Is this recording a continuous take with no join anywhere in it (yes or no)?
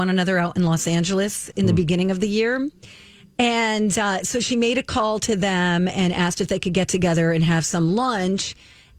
yes